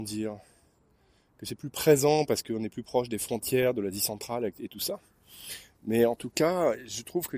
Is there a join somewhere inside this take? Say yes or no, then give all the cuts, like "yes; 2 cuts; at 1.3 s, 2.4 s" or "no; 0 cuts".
no; 0 cuts